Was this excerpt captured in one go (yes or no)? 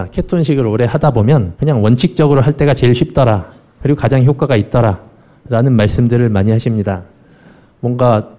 yes